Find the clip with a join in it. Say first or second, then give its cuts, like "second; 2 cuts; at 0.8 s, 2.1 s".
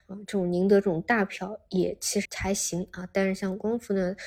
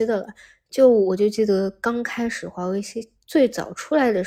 first; 1 cut; at 2.3 s